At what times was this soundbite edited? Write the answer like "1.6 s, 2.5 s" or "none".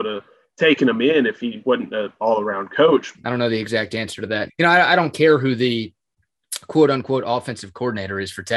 3.1 s, 4.5 s